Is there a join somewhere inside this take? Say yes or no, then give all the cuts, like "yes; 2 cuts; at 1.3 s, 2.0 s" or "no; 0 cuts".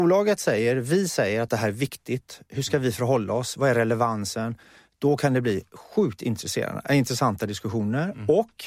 no; 0 cuts